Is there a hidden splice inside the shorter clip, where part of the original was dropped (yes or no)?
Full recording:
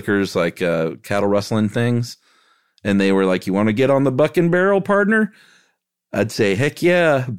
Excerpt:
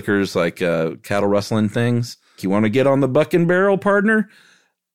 yes